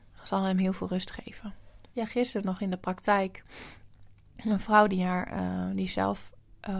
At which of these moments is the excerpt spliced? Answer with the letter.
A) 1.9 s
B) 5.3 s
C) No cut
A